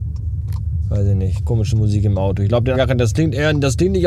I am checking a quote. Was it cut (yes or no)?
yes